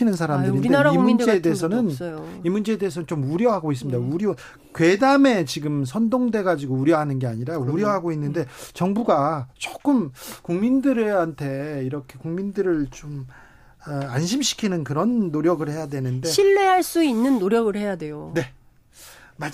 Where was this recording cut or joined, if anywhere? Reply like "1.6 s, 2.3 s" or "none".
none